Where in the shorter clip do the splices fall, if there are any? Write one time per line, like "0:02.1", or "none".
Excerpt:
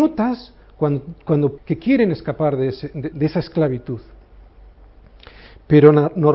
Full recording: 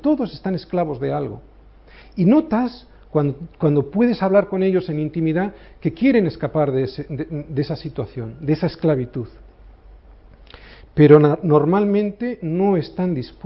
0:01.6
0:03.1